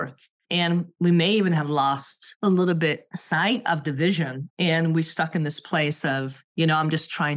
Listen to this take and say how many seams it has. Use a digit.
1